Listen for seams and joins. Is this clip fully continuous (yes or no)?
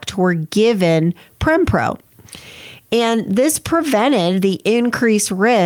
yes